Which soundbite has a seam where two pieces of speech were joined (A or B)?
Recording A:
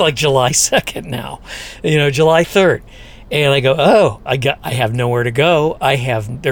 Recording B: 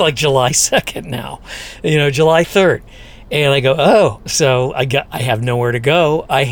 A